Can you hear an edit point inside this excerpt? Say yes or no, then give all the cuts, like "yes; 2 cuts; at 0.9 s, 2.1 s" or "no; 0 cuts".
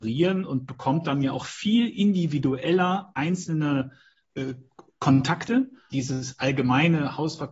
yes; 1 cut; at 5.9 s